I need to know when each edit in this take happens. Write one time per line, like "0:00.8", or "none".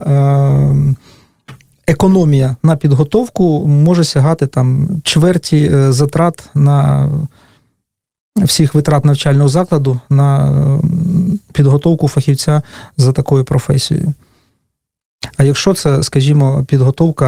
0:03.6